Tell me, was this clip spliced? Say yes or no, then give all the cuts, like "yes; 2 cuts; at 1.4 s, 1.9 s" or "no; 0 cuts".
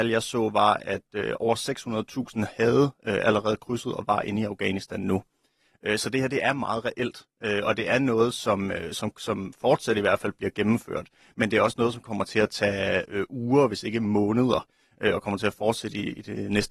no; 0 cuts